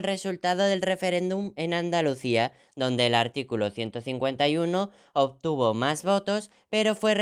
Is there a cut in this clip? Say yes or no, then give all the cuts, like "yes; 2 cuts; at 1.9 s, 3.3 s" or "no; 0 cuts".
no; 0 cuts